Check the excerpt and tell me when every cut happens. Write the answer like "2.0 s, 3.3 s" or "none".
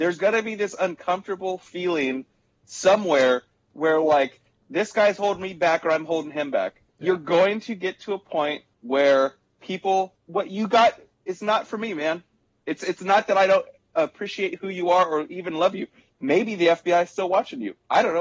16.1 s